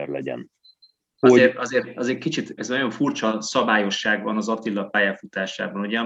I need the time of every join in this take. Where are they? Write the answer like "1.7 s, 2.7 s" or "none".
1.2 s, 2.6 s

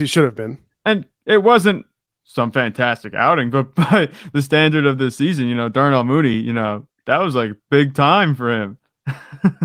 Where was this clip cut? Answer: none

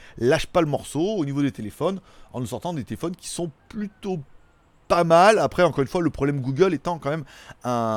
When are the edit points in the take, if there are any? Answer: none

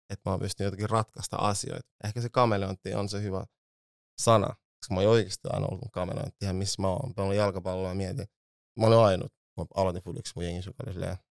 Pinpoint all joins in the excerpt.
none

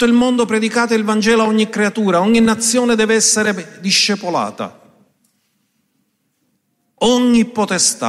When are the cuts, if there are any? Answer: none

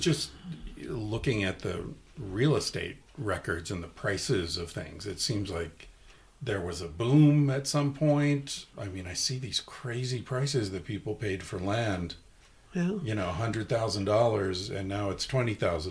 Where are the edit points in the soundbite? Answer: none

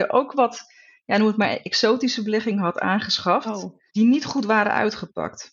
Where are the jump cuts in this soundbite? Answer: 3.9 s

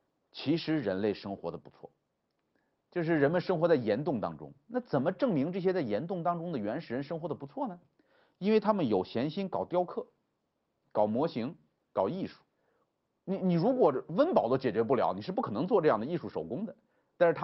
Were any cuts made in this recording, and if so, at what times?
none

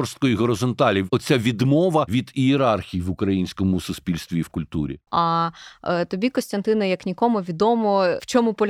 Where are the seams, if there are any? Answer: 5.1 s

